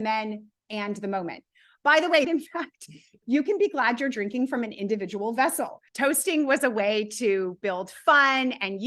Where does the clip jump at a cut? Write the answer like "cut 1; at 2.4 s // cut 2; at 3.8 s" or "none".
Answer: cut 1; at 2.2 s // cut 2; at 5.9 s